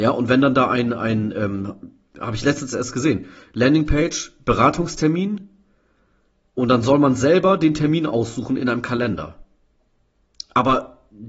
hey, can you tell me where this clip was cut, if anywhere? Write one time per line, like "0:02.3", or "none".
none

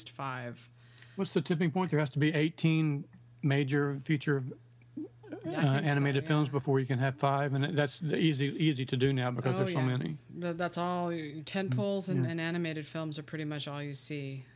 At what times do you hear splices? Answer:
none

